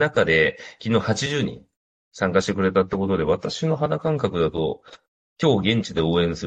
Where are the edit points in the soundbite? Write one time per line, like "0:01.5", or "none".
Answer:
none